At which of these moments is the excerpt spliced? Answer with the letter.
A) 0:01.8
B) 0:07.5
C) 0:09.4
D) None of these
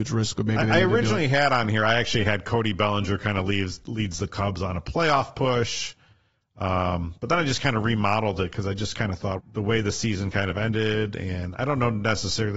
C